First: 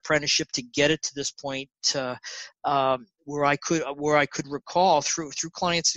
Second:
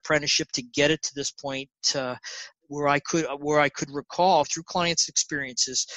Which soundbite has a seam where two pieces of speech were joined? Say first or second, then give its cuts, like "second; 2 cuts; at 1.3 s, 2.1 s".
second; 2 cuts; at 2.6 s, 4.4 s